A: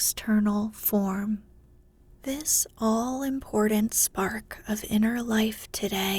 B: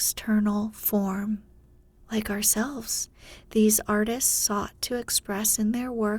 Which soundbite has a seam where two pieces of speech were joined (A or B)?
B